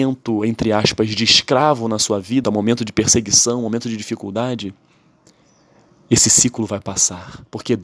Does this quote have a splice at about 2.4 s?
yes; 1 cut; at 2.4 s

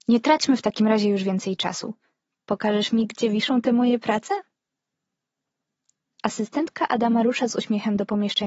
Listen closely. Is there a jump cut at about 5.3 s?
no; 0 cuts

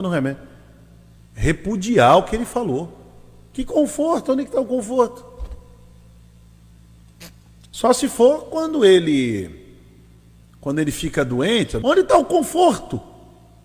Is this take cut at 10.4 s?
no; 2 cuts; at 1.2 s, 11.8 s

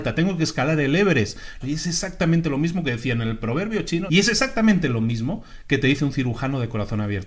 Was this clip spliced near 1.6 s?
yes; 2 cuts; at 1.6 s, 4.1 s

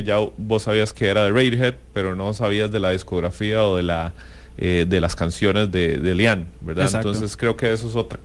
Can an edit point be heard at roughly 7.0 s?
no; 0 cuts

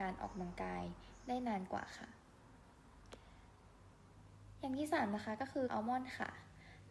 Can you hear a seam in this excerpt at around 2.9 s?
no; 1 cut; at 5.7 s

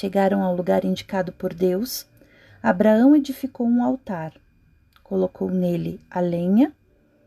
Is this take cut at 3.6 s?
no; 0 cuts

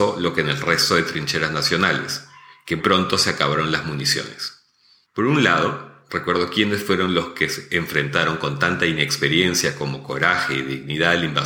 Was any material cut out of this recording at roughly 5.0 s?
yes; 2 cuts; at 2.8 s, 5.0 s

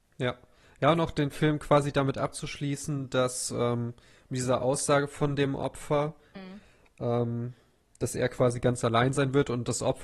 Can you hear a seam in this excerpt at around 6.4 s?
yes; 1 cut; at 6.4 s

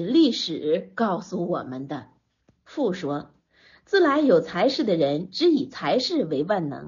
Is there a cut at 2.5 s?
yes; 1 cut; at 2.5 s

